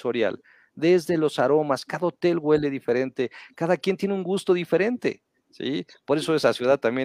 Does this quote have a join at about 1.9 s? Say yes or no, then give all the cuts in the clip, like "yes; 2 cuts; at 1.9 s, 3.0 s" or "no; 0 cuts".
yes; 1 cut; at 1.9 s